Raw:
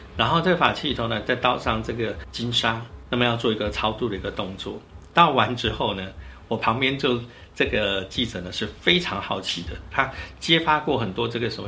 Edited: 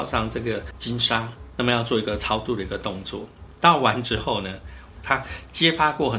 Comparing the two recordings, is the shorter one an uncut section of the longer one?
no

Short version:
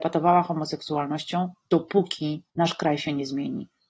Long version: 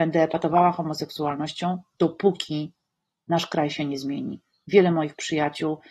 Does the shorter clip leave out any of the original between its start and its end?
yes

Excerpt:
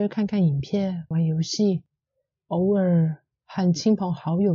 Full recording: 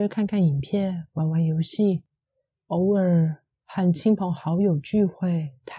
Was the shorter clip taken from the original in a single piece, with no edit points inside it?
no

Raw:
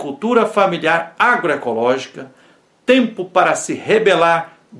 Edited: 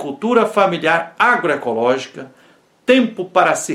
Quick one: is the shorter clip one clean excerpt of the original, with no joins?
yes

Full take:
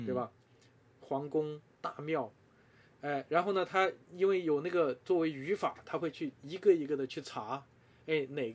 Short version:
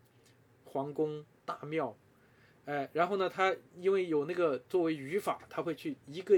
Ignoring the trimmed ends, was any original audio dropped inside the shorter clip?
no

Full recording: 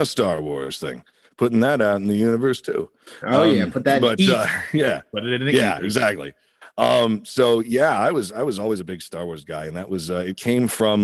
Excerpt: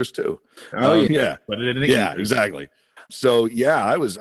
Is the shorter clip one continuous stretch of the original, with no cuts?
no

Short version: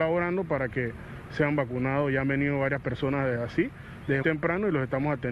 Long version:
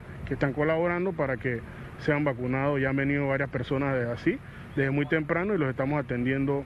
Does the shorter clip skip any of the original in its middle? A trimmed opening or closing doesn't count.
yes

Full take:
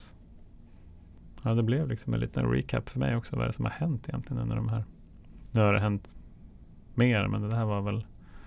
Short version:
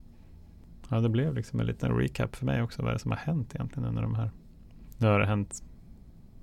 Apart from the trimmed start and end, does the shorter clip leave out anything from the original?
no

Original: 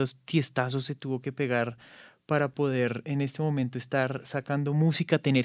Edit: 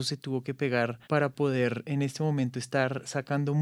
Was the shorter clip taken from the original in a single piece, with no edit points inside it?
no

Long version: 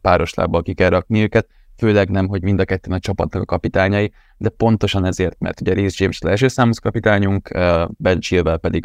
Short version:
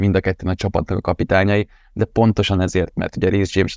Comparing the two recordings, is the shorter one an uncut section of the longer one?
yes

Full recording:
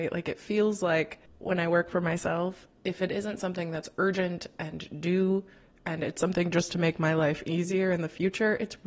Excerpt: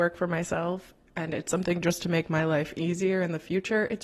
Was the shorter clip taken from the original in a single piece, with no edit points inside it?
no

